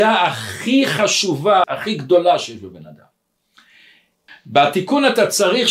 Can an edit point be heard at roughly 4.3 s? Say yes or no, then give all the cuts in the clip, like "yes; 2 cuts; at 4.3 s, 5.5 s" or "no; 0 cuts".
yes; 2 cuts; at 1.6 s, 4.3 s